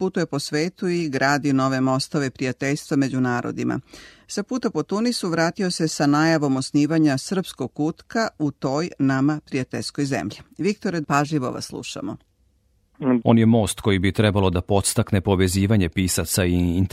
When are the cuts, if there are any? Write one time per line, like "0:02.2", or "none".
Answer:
0:11.0
0:13.2